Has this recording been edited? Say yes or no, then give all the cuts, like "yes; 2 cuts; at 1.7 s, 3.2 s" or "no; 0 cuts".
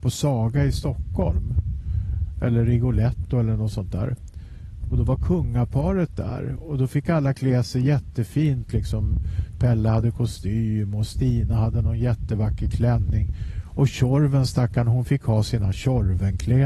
no; 0 cuts